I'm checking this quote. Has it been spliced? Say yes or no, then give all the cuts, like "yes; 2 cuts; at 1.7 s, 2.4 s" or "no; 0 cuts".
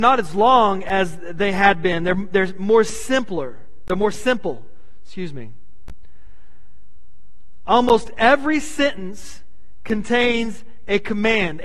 no; 0 cuts